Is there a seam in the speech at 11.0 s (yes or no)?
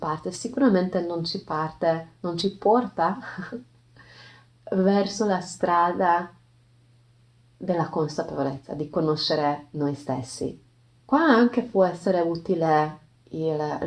yes